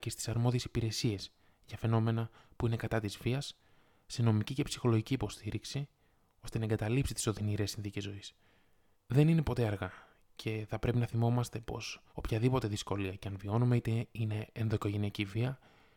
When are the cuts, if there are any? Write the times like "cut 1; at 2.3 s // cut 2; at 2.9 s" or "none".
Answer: cut 1; at 8.9 s // cut 2; at 12.1 s